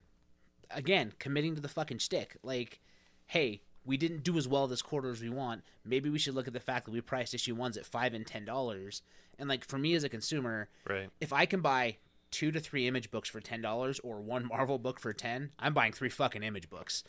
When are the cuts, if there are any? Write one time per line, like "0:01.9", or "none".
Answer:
none